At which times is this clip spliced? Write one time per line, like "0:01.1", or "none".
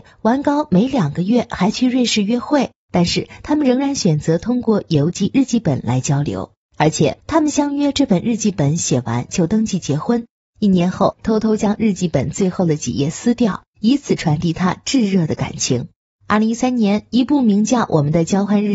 0:11.2